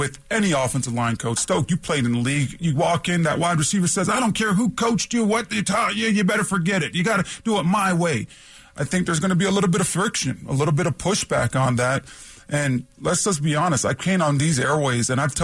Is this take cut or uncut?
uncut